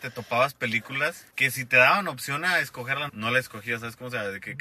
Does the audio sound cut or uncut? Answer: cut